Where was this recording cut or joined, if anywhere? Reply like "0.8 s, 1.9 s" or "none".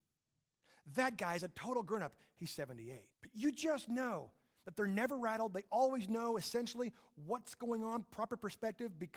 3.1 s